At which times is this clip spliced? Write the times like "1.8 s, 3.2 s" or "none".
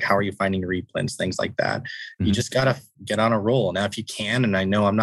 none

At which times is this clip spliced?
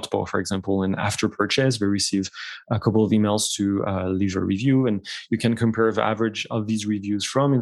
none

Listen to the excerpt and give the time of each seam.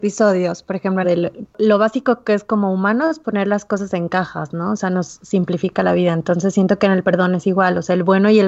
1.0 s

